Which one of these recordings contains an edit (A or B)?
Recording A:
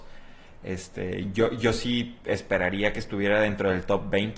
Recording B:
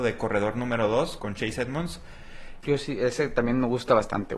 B